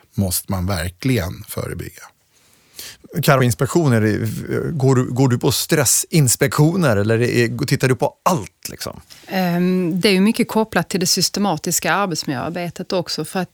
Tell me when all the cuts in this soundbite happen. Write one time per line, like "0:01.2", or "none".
0:03.4